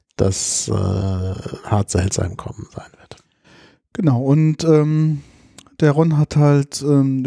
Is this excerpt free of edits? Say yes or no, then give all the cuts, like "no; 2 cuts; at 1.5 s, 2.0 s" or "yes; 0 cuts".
yes; 0 cuts